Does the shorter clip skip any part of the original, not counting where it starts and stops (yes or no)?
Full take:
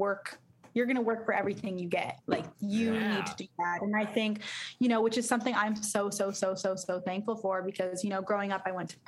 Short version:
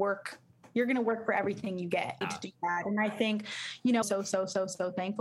yes